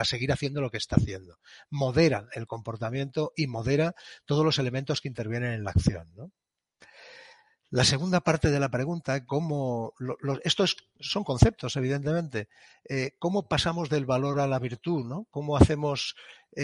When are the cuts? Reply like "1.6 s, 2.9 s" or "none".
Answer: 9.3 s